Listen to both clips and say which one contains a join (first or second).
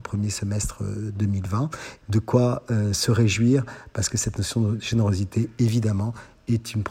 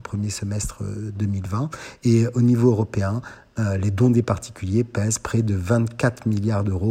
first